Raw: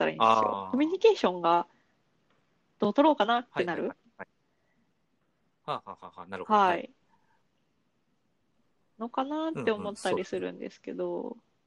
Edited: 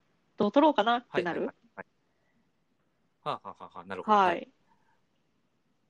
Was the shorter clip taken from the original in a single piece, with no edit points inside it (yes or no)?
yes